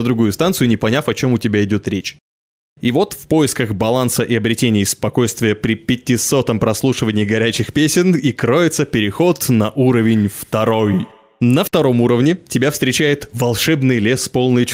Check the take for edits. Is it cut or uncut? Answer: uncut